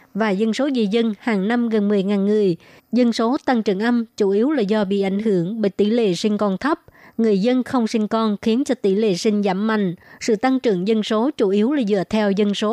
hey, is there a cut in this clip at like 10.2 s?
no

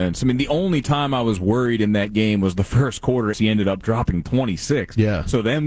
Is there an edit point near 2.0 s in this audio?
no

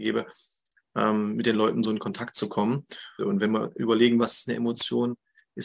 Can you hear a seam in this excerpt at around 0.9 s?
no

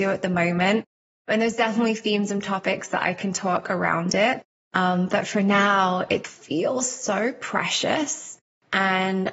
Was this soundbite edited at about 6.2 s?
yes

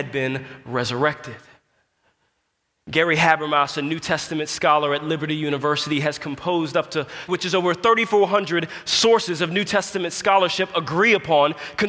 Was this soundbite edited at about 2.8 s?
no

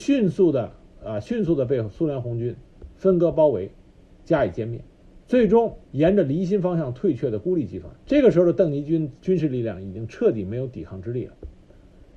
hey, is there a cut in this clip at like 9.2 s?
yes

